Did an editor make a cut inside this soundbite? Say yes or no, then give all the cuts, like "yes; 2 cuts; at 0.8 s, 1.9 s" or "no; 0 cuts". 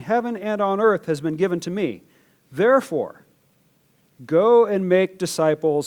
no; 0 cuts